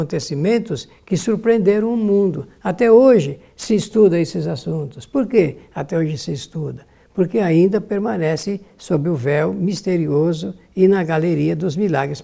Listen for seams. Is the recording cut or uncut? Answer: uncut